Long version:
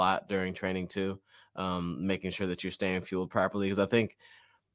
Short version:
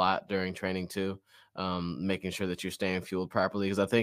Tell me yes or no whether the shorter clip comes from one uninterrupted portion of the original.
yes